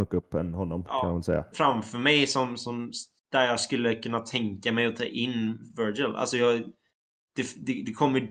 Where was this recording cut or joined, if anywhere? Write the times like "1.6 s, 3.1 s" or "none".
1.5 s